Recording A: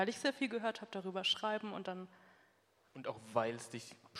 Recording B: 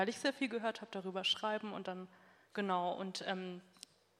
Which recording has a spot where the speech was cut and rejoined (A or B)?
B